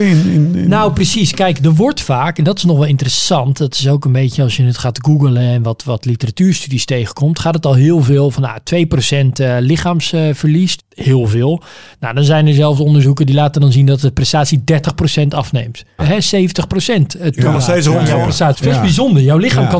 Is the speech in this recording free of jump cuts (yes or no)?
no